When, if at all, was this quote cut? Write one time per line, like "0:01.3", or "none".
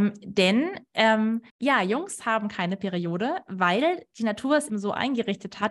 0:01.5
0:04.7

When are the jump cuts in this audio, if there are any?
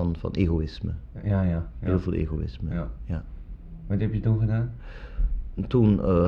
none

